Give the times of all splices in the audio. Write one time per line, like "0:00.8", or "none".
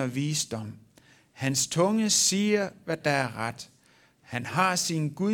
none